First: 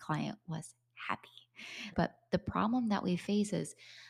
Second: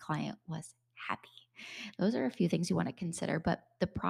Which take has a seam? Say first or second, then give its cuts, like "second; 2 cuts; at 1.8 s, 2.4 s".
first; 1 cut; at 1.9 s